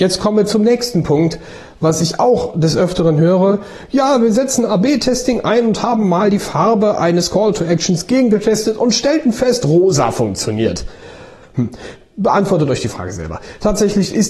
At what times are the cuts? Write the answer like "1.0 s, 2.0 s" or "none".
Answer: 11.4 s